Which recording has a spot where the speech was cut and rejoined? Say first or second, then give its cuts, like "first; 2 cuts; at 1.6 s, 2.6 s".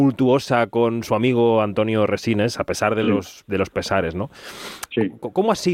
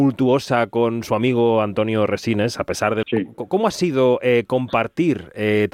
second; 1 cut; at 3.0 s